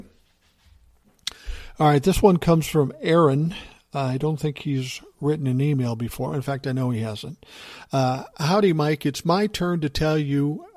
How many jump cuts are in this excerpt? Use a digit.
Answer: 0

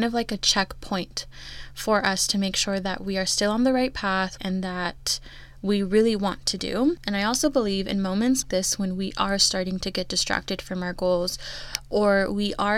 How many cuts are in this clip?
3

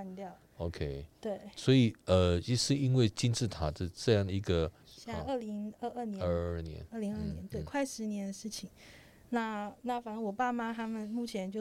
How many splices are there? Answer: 1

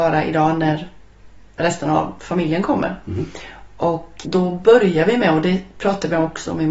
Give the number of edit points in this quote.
1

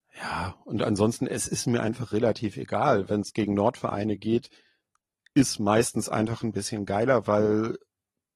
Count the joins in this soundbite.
0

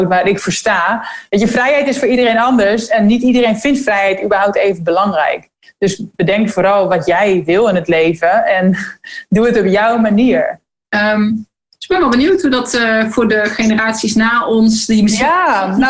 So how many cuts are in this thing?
1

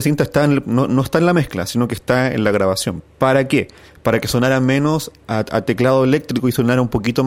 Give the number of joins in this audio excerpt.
2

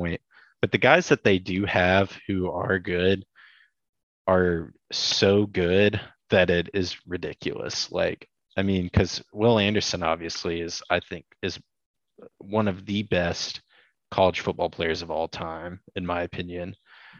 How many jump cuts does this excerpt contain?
0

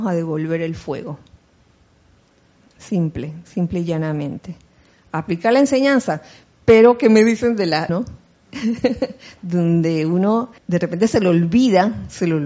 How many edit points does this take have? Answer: 2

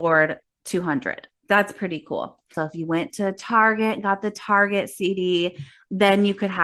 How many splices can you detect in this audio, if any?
2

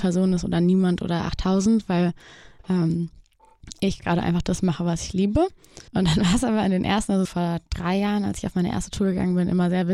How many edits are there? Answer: 2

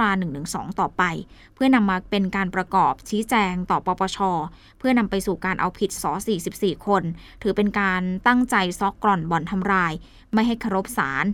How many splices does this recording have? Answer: 1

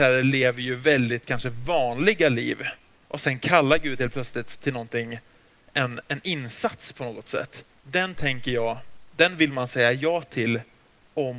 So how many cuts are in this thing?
1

